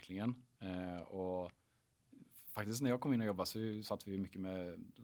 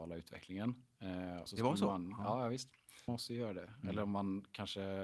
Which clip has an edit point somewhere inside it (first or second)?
second